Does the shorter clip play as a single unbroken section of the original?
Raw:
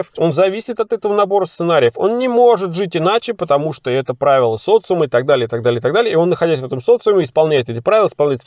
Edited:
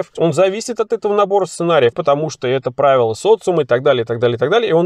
no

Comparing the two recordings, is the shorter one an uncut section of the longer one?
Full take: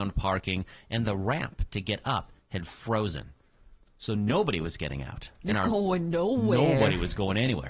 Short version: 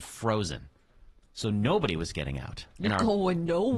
yes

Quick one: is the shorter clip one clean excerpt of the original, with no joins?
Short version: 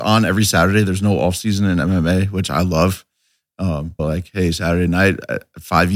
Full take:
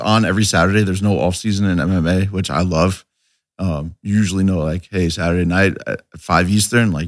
no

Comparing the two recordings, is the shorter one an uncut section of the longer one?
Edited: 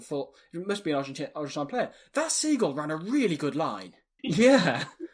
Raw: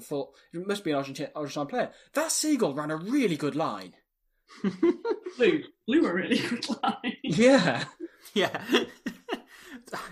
no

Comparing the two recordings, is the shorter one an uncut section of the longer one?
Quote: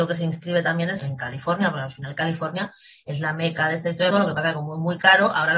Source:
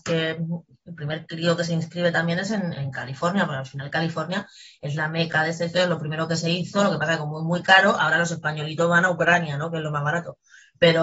no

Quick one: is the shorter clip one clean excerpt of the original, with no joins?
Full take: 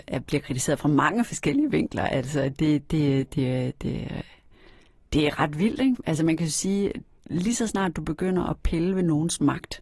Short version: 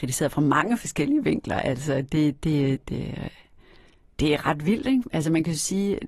no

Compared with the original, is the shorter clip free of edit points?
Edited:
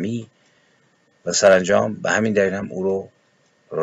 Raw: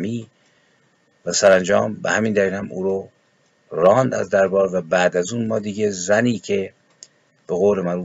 yes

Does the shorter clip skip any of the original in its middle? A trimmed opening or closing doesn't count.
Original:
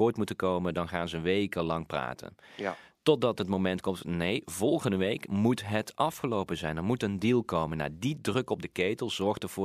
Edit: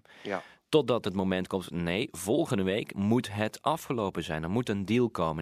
no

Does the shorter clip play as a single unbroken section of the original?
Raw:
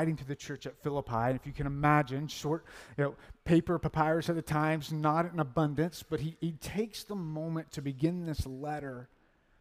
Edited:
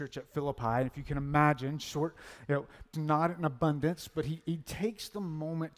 no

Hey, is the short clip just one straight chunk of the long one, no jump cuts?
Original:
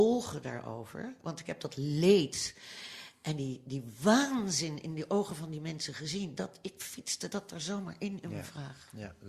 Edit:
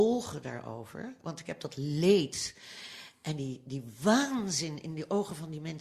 yes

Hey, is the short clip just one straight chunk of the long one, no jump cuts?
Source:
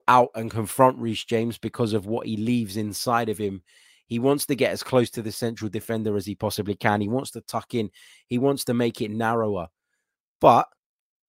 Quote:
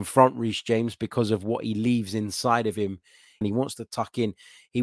no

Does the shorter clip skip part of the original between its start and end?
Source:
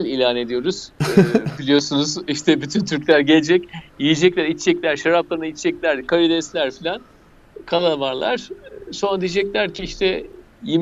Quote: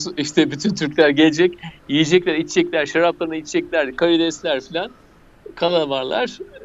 no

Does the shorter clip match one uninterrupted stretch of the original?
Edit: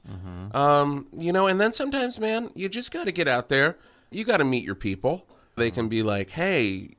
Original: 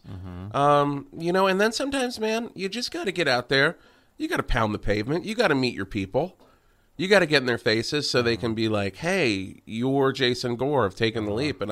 no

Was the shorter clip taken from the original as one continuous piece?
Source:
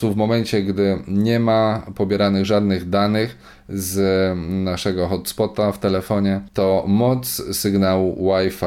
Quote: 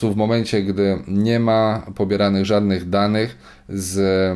yes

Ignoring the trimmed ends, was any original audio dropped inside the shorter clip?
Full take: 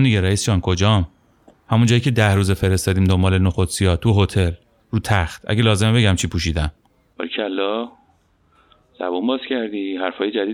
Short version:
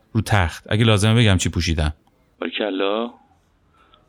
no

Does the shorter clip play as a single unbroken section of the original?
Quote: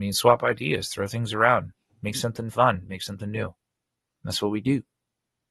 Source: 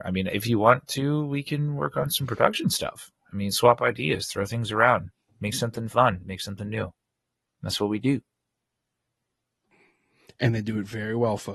yes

